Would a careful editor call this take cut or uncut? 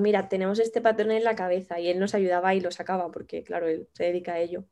uncut